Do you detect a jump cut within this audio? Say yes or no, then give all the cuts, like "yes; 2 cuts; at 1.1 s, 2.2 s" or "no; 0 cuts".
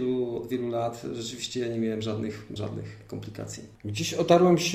yes; 1 cut; at 2.6 s